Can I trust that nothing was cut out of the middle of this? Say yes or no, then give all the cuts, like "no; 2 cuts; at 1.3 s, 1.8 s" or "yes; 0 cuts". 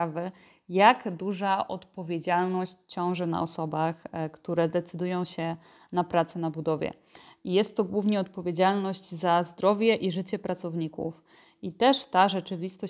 yes; 0 cuts